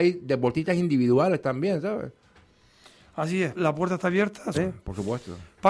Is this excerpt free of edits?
no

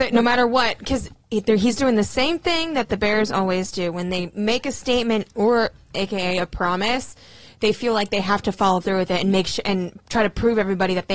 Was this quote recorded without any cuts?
yes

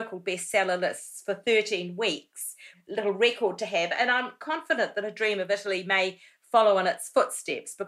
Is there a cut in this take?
yes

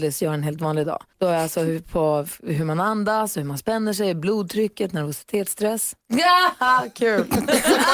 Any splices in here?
yes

